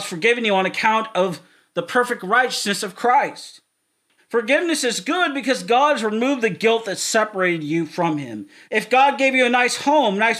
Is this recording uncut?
no; 2 cuts; at 4.2 s, 8.7 s

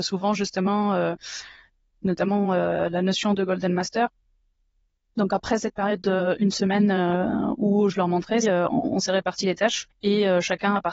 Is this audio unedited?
no; 2 cuts; at 2.0 s, 8.4 s

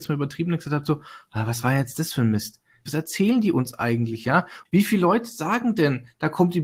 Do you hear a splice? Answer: yes; 2 cuts; at 2.9 s, 4.7 s

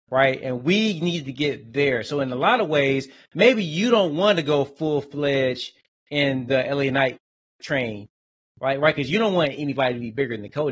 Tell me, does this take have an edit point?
no; 0 cuts

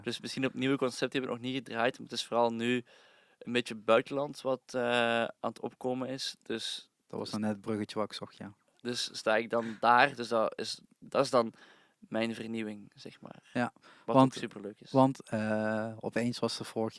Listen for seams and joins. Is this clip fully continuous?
yes; 0 cuts

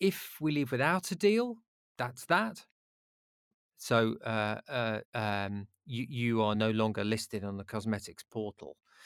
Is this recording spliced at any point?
yes; 3 cuts; at 3.7 s, 5.0 s, 6.5 s

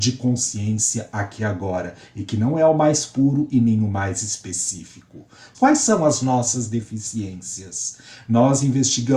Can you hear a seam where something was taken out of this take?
yes; 1 cut; at 5.5 s

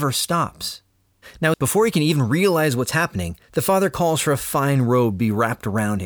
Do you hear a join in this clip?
yes; 2 cuts; at 1.5 s, 3.4 s

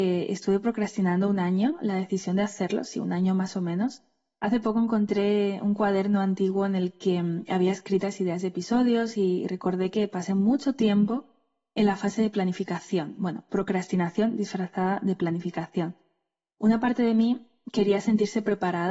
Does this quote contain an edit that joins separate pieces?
no; 0 cuts

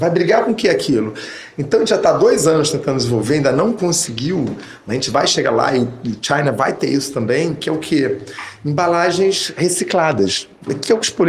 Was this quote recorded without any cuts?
yes; 0 cuts

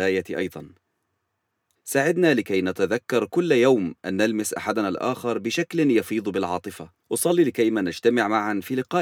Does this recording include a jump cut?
yes; 2 cuts; at 1.8 s, 7.0 s

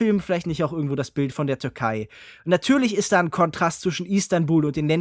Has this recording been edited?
no; 0 cuts

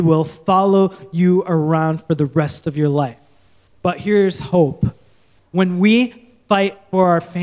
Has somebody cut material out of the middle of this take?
no; 0 cuts

